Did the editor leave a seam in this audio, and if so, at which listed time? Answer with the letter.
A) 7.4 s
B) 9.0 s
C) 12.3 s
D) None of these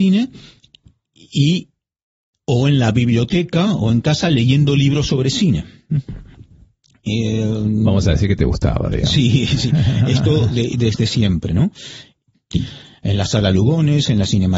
C